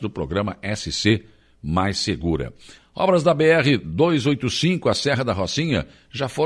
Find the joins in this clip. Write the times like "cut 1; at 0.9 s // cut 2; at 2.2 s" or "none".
cut 1; at 2.8 s

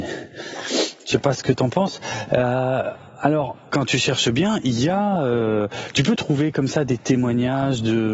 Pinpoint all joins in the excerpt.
cut 1; at 3.7 s

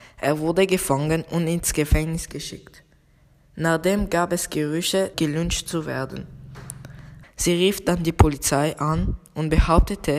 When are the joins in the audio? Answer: cut 1; at 5.1 s // cut 2; at 7.2 s

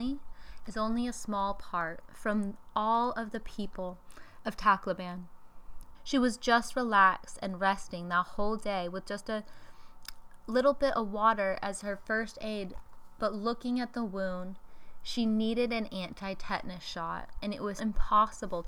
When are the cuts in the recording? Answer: cut 1; at 5.9 s // cut 2; at 17.8 s

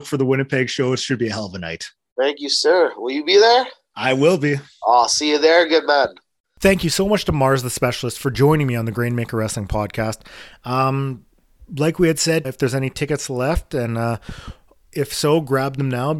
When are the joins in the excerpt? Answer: cut 1; at 12.4 s

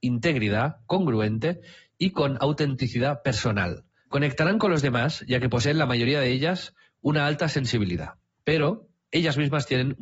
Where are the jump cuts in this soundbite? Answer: cut 1; at 4.1 s // cut 2; at 8.3 s

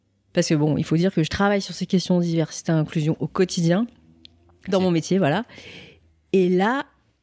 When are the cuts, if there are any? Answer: cut 1; at 4.7 s

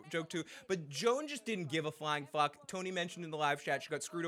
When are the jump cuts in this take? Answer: none

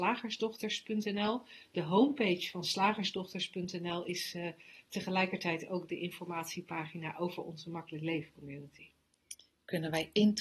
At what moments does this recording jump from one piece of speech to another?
none

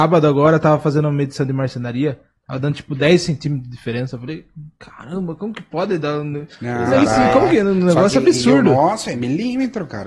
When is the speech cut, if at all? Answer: none

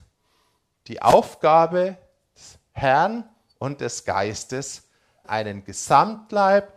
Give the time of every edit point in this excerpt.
cut 1; at 5.2 s

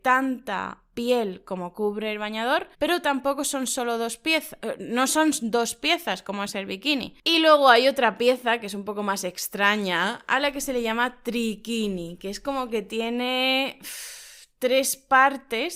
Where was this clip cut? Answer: cut 1; at 2.7 s // cut 2; at 7.2 s

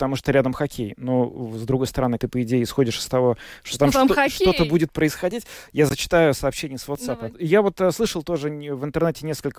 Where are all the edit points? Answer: cut 1; at 2.2 s // cut 2; at 7.3 s

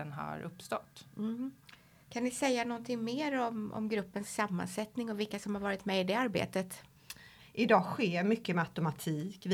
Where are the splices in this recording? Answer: cut 1; at 2.0 s // cut 2; at 7.4 s

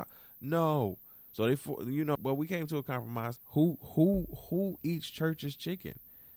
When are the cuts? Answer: cut 1; at 2.2 s // cut 2; at 3.4 s

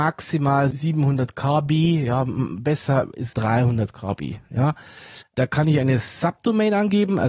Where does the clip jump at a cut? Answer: cut 1; at 3.3 s // cut 2; at 5.2 s

